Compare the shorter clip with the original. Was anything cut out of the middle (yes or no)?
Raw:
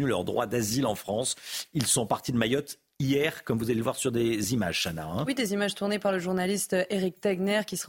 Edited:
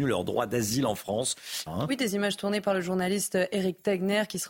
yes